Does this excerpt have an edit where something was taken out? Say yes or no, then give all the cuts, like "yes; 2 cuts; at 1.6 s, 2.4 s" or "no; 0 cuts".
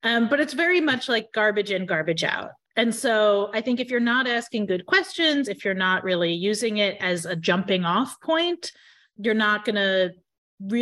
no; 0 cuts